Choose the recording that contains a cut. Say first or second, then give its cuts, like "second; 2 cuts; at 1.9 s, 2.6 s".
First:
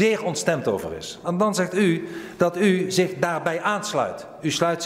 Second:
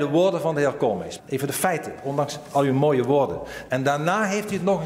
second; 2 cuts; at 1.2 s, 3.7 s